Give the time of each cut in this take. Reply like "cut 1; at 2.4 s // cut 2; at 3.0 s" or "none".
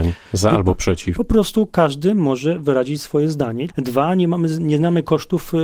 cut 1; at 1.1 s // cut 2; at 3.7 s